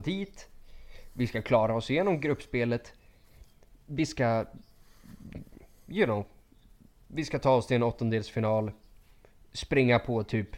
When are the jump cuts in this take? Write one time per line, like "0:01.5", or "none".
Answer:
none